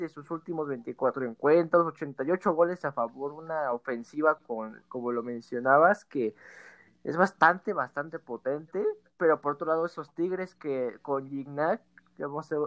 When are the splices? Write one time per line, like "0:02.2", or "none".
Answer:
none